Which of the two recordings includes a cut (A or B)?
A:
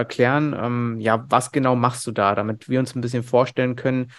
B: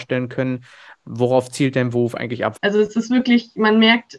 B